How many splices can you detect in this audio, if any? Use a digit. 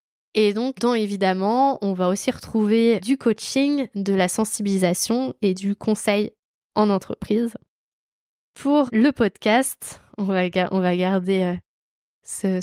0